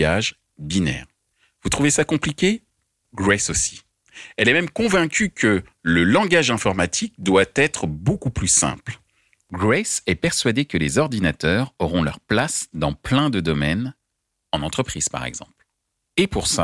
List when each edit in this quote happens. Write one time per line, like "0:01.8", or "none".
none